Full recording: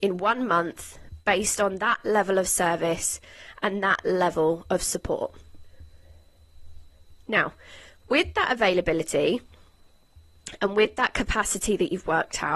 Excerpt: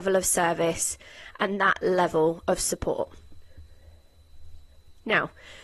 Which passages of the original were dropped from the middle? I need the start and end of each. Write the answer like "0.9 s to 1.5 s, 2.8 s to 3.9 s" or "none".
none